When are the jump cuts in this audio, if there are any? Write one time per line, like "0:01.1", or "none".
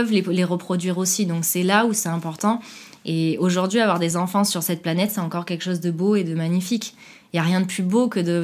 none